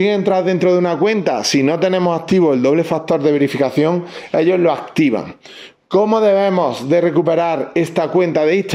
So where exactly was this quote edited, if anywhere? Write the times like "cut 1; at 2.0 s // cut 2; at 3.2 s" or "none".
none